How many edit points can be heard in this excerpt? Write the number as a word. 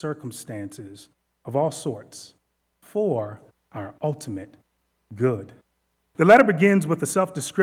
one